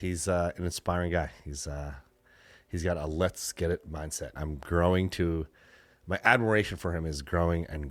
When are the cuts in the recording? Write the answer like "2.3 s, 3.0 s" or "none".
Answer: 4.4 s